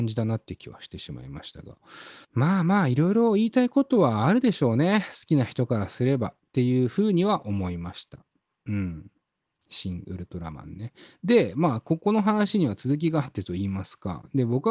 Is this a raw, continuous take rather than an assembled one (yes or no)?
no